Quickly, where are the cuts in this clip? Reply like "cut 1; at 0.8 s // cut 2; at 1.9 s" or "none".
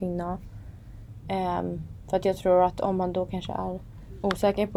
cut 1; at 1.2 s